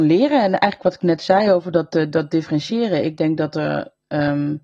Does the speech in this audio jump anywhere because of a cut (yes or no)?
no